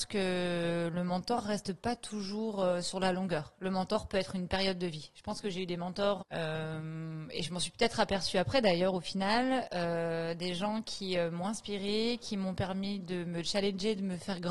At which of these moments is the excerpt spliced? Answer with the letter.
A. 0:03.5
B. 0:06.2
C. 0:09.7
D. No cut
B